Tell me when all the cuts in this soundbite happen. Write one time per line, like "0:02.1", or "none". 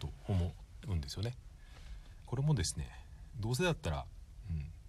0:02.3
0:03.3